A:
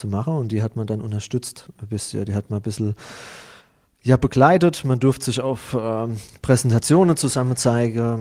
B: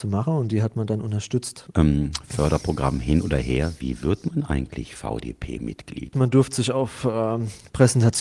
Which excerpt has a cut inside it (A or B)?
B